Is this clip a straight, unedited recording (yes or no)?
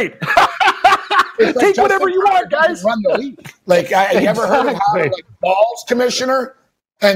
yes